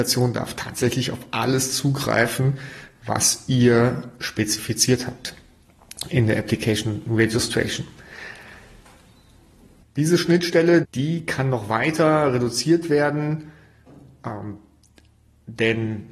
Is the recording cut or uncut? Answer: cut